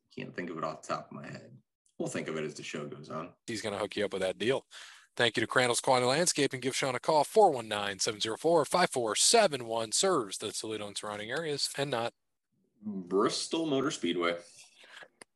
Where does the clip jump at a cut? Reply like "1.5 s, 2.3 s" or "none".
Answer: 3.5 s